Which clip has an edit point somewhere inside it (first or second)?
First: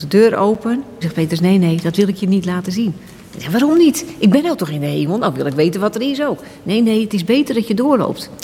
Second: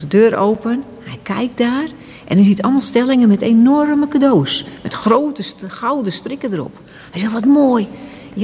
first